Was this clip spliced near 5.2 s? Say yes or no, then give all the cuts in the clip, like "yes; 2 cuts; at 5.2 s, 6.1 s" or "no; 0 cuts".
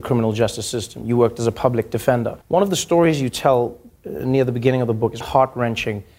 yes; 2 cuts; at 2.4 s, 5.2 s